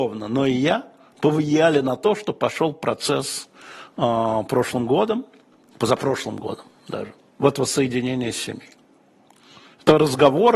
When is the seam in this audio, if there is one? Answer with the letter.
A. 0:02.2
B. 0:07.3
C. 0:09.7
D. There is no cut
B